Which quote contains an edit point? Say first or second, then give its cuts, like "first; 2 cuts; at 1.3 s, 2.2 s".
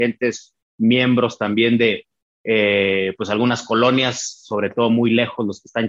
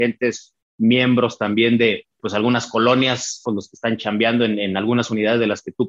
second; 2 cuts; at 2.2 s, 3.5 s